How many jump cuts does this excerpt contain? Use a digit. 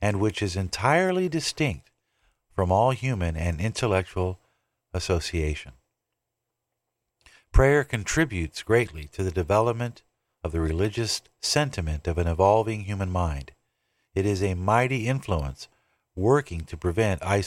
0